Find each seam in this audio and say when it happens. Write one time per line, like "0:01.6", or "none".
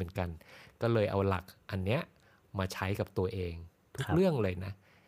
none